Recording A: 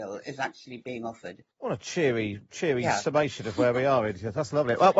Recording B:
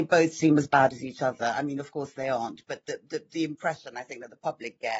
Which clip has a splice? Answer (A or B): A